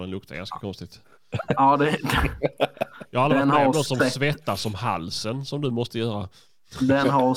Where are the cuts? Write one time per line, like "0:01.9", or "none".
none